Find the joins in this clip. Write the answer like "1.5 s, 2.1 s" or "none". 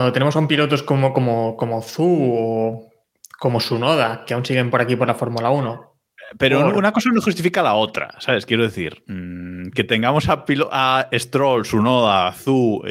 none